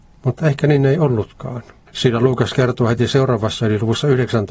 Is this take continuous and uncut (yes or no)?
yes